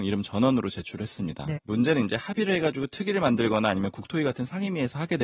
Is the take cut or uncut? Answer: cut